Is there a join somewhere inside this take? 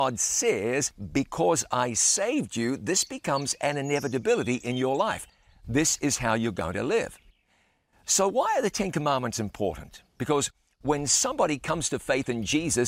no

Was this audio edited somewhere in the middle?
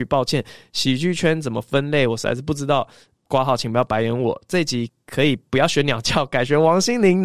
no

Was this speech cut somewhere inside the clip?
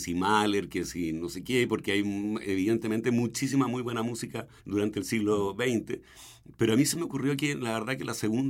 yes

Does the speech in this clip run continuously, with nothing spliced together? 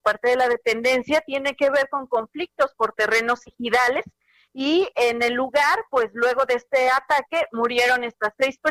yes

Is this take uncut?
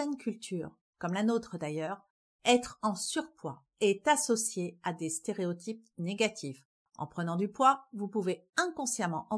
yes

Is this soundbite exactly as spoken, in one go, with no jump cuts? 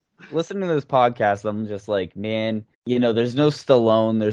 no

